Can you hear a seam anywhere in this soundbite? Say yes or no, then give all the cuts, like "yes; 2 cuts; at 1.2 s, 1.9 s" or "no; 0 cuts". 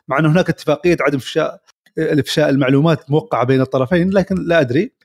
no; 0 cuts